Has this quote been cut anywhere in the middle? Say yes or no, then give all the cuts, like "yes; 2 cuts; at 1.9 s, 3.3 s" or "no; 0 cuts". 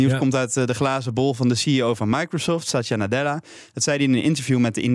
no; 0 cuts